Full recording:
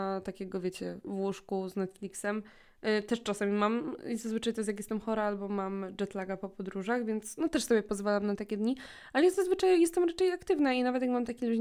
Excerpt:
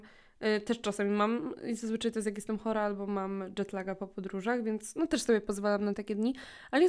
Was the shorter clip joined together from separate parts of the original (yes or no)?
no